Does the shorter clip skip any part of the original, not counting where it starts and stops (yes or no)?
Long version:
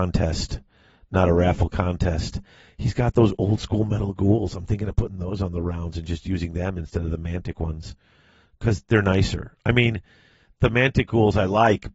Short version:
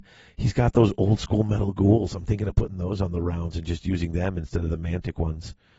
no